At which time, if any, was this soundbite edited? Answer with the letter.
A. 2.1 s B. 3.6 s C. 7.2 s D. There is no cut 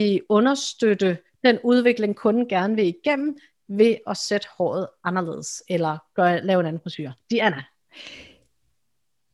D